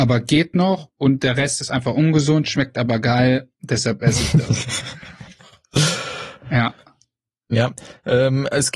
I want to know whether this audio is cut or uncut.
cut